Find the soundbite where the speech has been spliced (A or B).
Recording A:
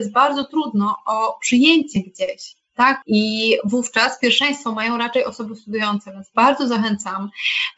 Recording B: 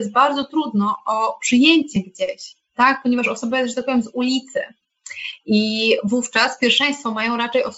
A